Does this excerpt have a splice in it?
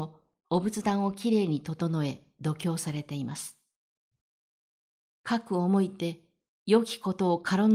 yes; 1 cut; at 5.2 s

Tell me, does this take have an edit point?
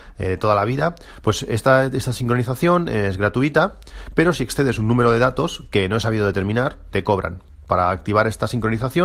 yes; 1 cut; at 6.9 s

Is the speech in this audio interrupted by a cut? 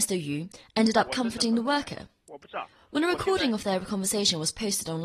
no; 0 cuts

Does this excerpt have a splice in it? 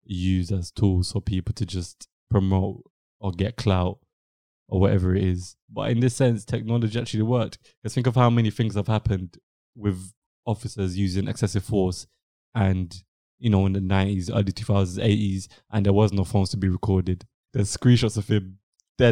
yes; 1 cut; at 17.5 s

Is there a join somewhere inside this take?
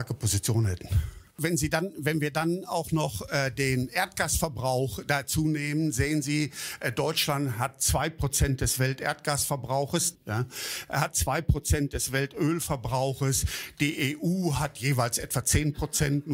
yes; 1 cut; at 10.2 s

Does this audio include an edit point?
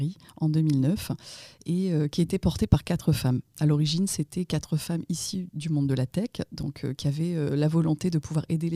no; 0 cuts

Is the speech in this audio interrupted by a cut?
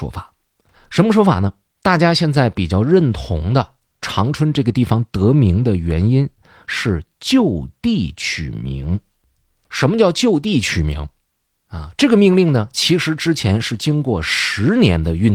yes; 2 cuts; at 1.8 s, 11.5 s

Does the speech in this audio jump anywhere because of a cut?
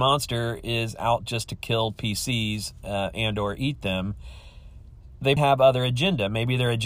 yes; 1 cut; at 5.4 s

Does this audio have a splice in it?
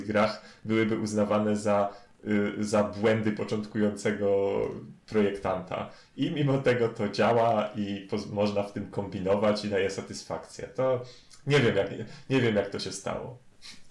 no; 0 cuts

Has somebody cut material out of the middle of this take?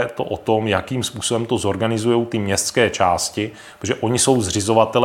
no; 0 cuts

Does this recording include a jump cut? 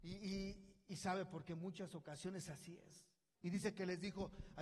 yes; 1 cut; at 3.4 s

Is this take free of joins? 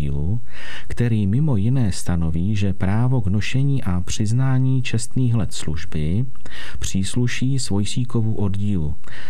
yes; 0 cuts

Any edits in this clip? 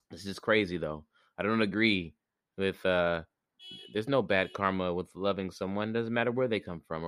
no; 0 cuts

